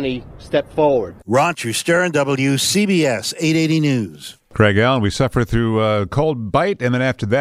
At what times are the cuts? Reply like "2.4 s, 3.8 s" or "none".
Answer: none